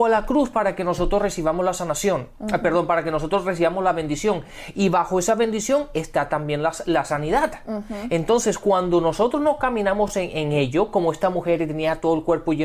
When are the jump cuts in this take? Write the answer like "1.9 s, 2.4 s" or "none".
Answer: none